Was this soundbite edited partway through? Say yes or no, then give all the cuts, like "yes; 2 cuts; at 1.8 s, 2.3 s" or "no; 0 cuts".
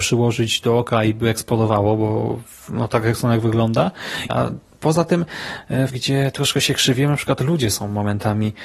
yes; 2 cuts; at 4.3 s, 5.9 s